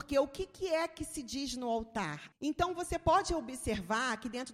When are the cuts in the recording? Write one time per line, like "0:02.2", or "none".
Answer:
0:02.3